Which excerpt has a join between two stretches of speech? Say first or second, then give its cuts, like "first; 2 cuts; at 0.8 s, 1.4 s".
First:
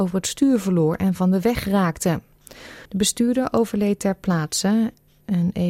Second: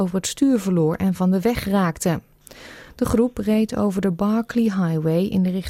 first; 1 cut; at 2.9 s